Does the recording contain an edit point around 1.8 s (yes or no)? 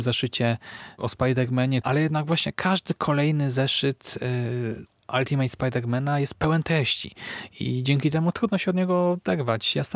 yes